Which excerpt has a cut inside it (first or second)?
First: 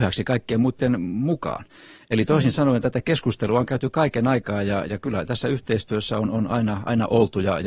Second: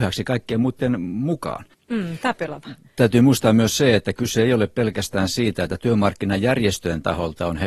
second